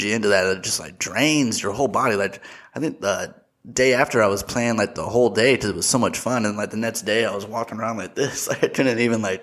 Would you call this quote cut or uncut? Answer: uncut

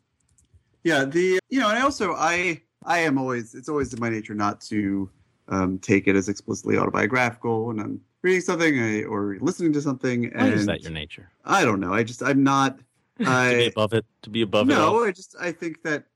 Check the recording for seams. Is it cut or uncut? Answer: cut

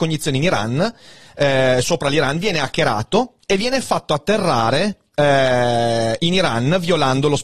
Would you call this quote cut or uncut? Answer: uncut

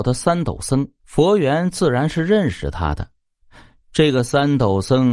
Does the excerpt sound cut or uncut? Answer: cut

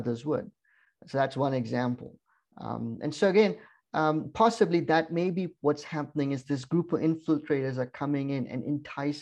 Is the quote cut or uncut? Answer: uncut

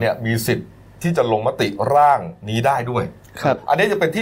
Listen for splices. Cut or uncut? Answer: uncut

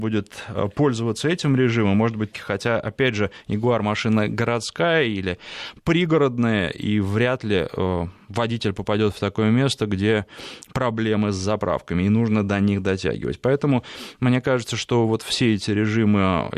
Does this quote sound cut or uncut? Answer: cut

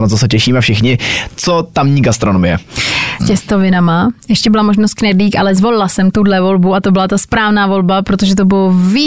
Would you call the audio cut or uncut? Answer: cut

